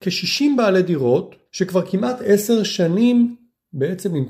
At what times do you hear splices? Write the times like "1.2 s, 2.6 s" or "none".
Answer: 1.5 s